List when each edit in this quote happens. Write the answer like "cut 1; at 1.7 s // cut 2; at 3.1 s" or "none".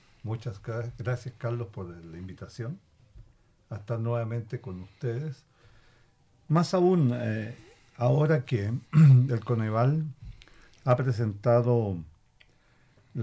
none